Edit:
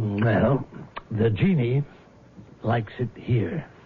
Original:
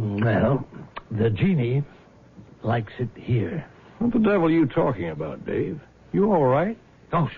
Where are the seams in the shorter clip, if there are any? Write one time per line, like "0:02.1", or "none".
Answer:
none